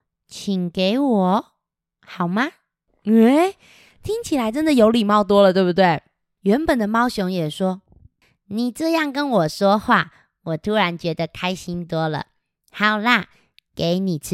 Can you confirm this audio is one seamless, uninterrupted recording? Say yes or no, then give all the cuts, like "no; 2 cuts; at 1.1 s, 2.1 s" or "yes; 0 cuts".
yes; 0 cuts